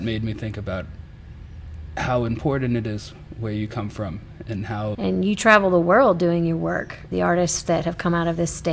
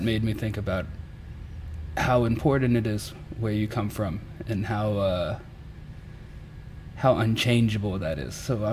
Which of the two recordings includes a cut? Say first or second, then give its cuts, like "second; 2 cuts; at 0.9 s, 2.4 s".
first; 2 cuts; at 4.9 s, 7.1 s